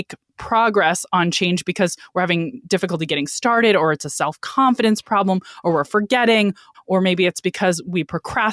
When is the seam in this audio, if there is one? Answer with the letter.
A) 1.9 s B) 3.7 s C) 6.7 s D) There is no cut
C